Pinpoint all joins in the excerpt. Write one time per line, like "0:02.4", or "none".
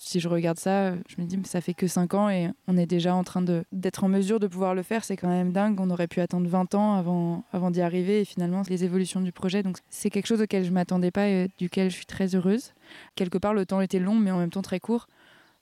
0:08.7
0:09.8
0:13.1